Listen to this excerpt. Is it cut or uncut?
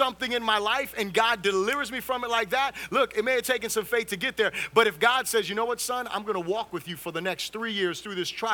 uncut